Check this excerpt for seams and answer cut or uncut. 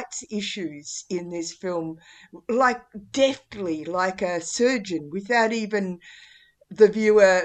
uncut